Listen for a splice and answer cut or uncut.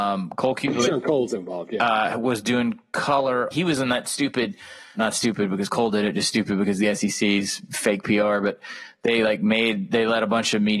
cut